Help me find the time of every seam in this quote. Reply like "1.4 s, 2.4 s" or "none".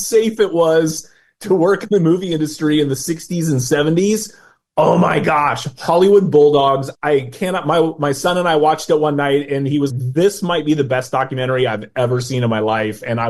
6.9 s, 9.9 s